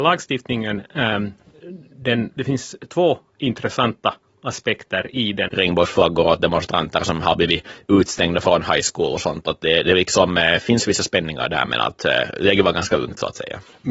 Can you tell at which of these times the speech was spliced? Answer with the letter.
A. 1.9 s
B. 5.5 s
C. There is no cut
B